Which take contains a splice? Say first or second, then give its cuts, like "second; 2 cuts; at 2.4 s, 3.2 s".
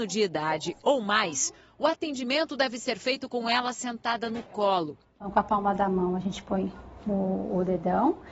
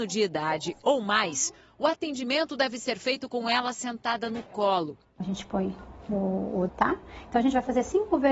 second; 2 cuts; at 5.2 s, 6.7 s